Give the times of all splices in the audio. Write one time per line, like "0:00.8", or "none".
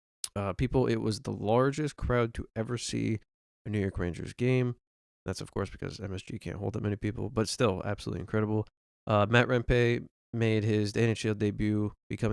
none